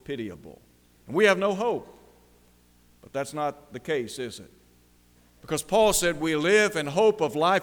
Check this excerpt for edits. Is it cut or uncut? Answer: cut